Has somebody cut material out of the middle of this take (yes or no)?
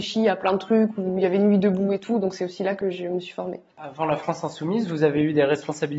no